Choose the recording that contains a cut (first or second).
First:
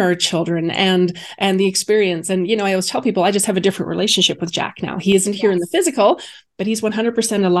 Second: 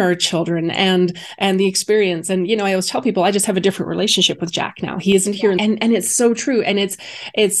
second